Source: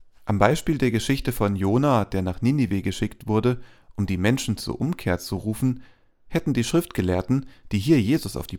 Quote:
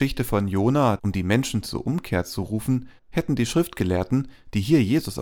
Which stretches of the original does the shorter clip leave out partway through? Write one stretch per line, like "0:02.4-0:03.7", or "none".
0:02.1-0:03.9
0:05.9-0:06.2